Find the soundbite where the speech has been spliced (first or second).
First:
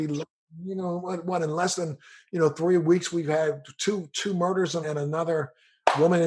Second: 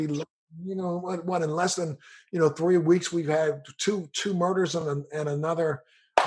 first